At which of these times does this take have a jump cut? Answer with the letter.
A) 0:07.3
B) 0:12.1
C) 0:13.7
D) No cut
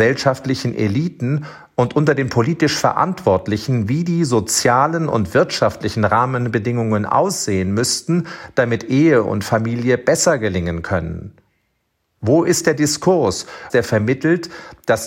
C